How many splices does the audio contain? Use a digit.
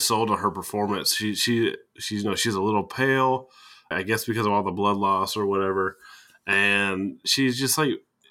1